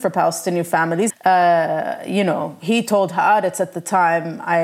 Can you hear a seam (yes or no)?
yes